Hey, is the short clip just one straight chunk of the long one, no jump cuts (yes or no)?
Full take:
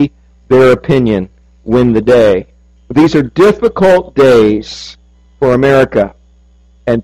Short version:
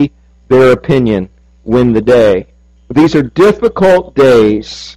yes